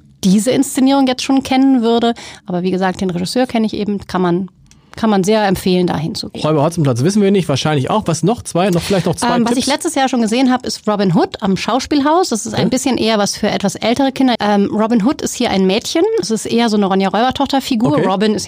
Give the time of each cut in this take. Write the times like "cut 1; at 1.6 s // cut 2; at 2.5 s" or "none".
cut 1; at 14.3 s // cut 2; at 16.2 s